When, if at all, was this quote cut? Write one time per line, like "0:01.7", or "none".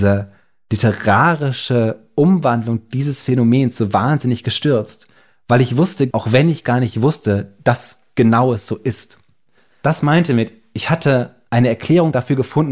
0:06.1

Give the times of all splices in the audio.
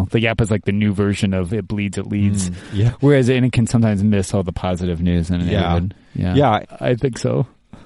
0:06.6

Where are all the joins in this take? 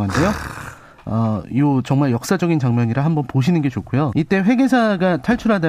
0:04.1

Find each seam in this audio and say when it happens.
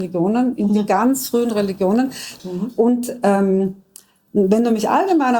0:02.4

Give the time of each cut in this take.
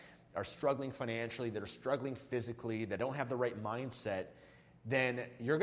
none

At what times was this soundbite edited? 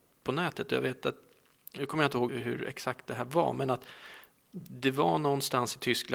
0:02.3

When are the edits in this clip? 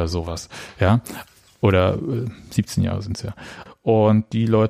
0:03.7

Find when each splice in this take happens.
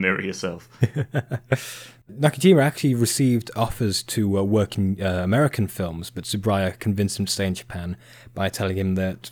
none

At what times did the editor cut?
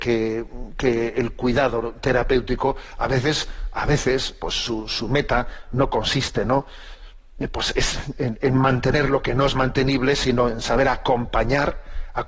none

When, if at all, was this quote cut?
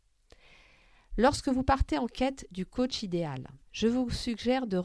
0:03.6

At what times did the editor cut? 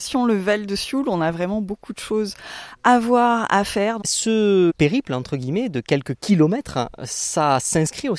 0:04.0

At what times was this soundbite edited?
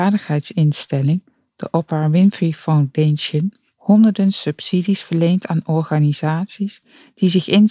none

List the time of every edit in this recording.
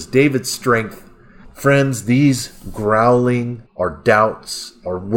0:01.4
0:03.7

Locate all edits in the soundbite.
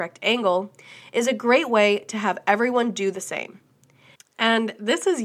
0:04.1

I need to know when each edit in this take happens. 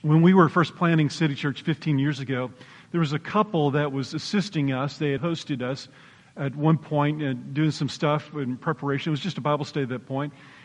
0:05.2

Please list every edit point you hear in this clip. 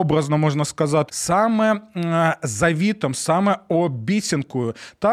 0:01.1

